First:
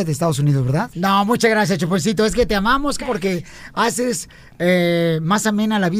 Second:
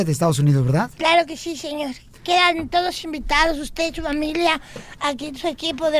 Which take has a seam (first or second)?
first